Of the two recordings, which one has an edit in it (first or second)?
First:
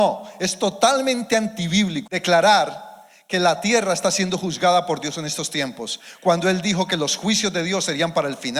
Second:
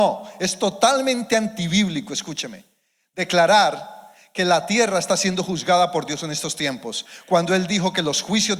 first